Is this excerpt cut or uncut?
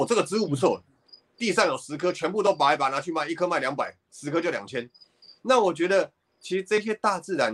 uncut